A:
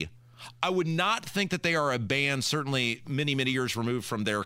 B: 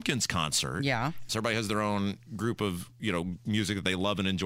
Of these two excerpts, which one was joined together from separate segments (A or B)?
B